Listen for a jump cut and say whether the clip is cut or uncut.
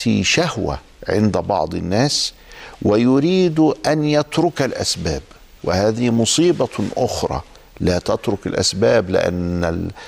uncut